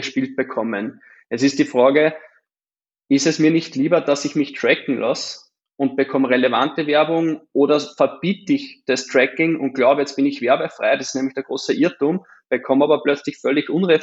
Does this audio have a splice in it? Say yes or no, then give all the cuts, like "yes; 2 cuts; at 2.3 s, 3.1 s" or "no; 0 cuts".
no; 0 cuts